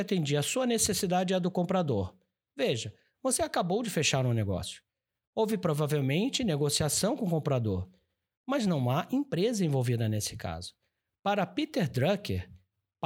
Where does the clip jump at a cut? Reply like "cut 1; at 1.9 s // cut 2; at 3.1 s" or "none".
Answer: none